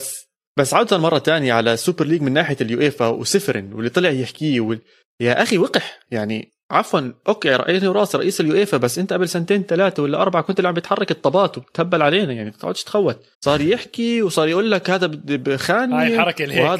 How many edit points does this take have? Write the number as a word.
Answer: two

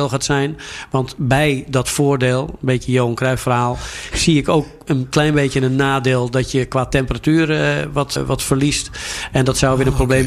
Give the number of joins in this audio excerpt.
one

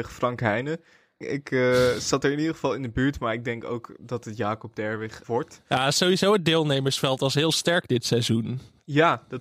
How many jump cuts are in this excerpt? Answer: two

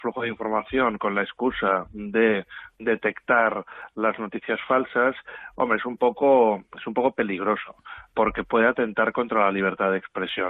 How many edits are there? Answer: one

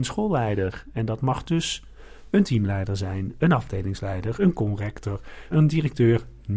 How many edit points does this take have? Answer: one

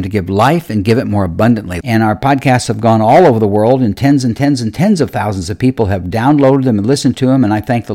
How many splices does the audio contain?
one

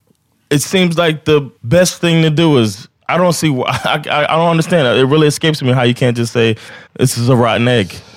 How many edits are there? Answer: two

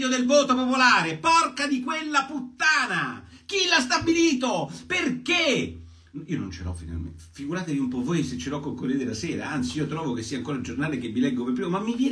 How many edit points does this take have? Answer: zero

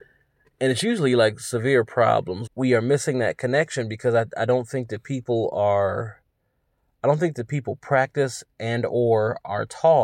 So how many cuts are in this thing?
one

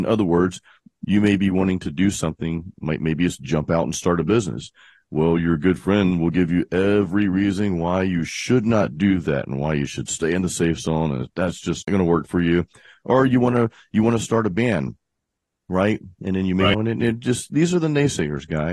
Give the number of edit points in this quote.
one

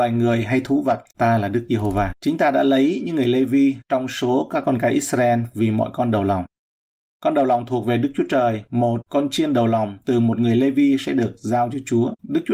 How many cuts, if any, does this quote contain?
one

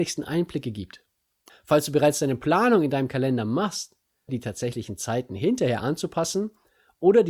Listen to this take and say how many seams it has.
two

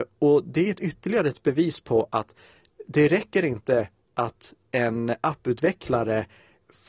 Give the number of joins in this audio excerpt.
one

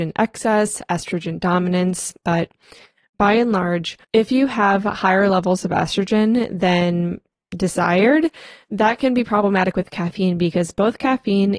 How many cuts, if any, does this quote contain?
two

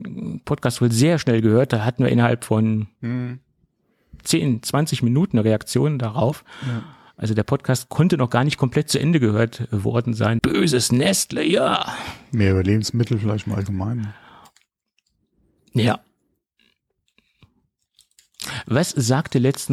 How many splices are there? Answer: one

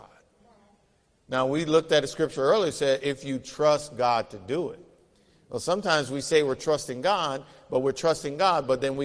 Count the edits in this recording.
zero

